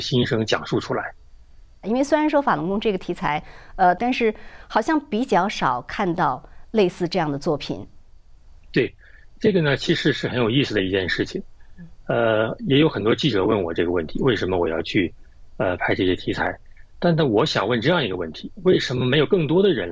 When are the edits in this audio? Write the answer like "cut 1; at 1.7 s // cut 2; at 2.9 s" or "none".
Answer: cut 1; at 1.8 s // cut 2; at 4.0 s